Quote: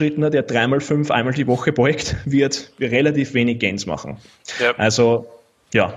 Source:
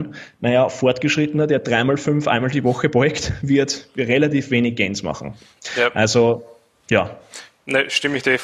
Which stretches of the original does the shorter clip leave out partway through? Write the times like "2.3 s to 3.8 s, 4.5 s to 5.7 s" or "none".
none